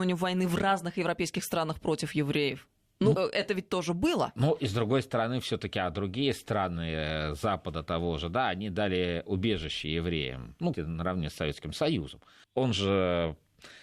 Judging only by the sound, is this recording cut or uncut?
cut